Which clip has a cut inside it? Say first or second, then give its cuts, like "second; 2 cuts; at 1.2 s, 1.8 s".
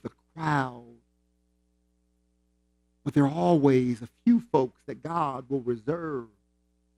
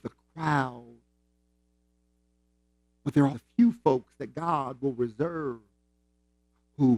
second; 1 cut; at 3.3 s